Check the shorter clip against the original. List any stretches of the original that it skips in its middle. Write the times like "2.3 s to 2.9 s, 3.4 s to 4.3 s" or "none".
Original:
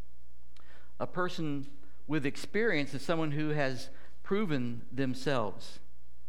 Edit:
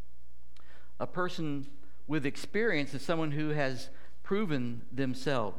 none

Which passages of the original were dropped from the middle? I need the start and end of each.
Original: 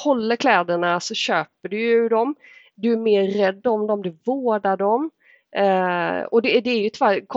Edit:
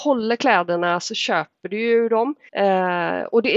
2.5 s to 5.5 s

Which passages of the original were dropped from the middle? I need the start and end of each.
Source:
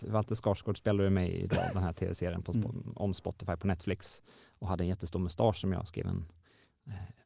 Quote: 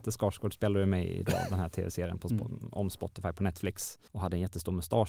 4.3 s to 4.5 s

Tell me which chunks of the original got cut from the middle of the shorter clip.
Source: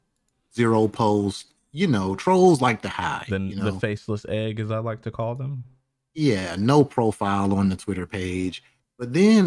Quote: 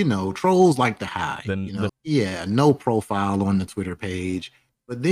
3.7 s to 6.0 s

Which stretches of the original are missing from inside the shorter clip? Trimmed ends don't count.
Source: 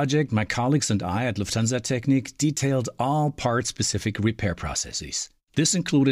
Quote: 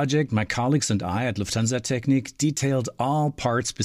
none

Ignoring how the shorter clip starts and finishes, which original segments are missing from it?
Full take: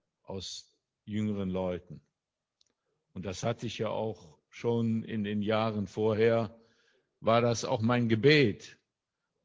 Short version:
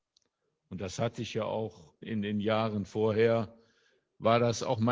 4.5 s to 5.0 s

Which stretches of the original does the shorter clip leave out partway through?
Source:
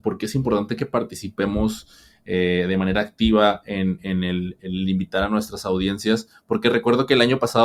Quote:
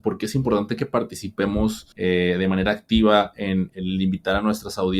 1.9 s to 2.2 s, 4.0 s to 4.6 s

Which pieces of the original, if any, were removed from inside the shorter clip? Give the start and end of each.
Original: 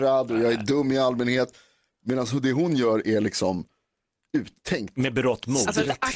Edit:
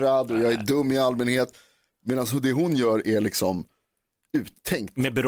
none

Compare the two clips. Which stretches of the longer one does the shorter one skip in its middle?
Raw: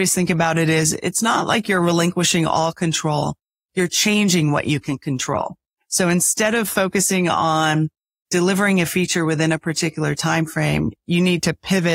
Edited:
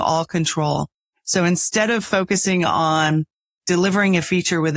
3.6 s to 5.8 s

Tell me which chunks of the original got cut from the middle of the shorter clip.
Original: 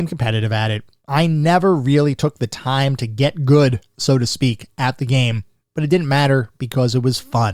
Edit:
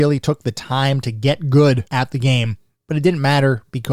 3.8 s to 4.7 s

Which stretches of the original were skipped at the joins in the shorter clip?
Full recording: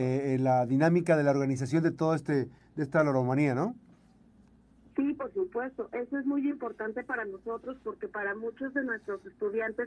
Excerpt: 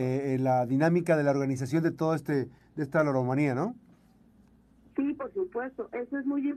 none

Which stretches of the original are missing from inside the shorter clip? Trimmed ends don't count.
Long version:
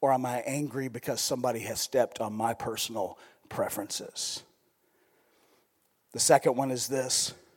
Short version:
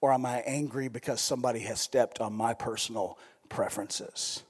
none

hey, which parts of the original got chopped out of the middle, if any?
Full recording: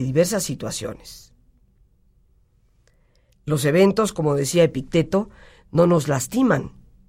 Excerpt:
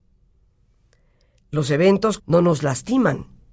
4.1 s to 5.6 s

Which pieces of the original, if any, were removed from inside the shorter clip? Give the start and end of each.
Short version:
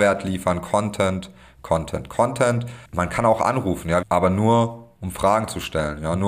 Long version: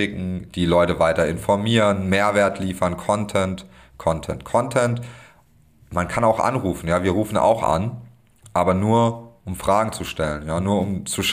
5.2 s to 5.8 s, 7.0 s to 8.5 s

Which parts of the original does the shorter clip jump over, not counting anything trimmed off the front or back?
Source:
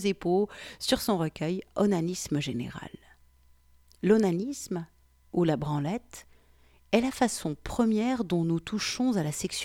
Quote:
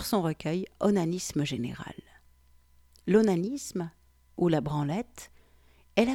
none

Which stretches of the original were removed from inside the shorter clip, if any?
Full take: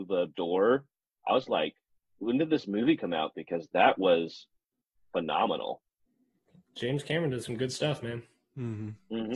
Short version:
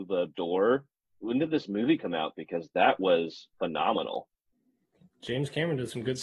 1.0 s to 2.0 s, 4.5 s to 5.1 s

